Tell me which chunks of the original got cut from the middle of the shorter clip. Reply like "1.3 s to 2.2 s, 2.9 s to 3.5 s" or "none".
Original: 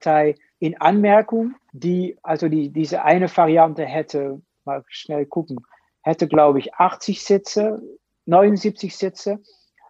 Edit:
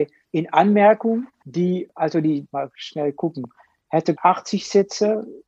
2.7 s to 4.6 s, 6.3 s to 6.7 s

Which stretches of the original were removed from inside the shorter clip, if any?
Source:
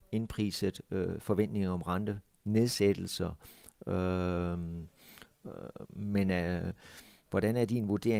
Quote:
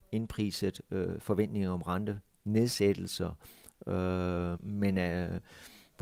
4.5 s to 5.9 s

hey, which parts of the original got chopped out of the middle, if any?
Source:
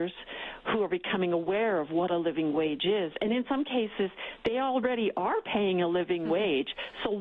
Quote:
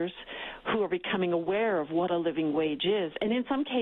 none

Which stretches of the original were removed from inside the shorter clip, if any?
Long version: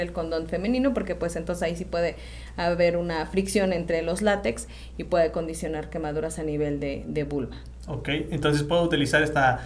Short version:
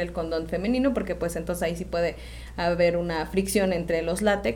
none

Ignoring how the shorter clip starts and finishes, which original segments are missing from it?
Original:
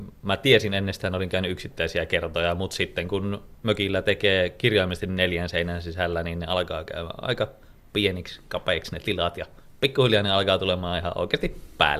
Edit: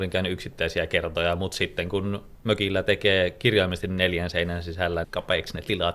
6.2 s to 8.4 s

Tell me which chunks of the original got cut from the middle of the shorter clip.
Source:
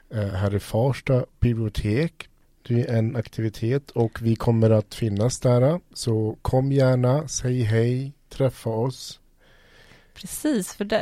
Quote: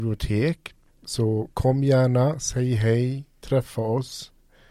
2.5 s to 5.9 s

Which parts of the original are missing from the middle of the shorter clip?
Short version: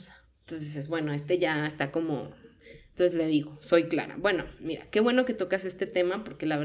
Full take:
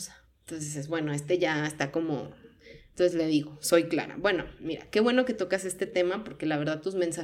none

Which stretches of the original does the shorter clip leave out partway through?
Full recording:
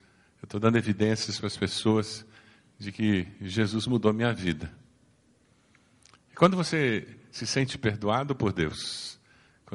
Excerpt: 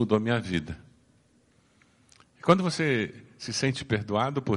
none

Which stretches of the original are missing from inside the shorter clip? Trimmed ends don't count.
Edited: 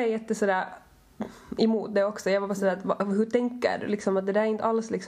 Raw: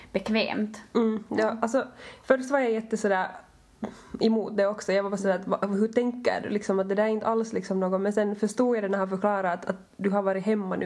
none

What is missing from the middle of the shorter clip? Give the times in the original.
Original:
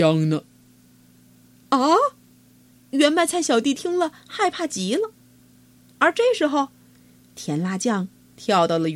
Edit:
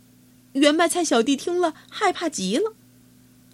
none

